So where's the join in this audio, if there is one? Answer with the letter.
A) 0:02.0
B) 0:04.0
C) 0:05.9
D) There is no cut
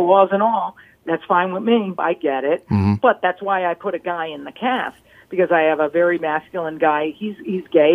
A